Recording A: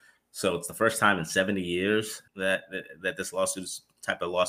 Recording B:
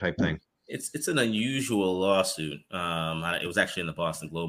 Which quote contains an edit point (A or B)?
A